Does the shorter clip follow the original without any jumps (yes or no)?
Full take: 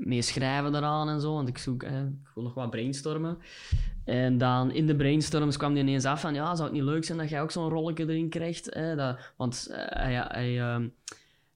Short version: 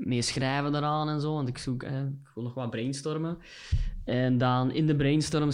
yes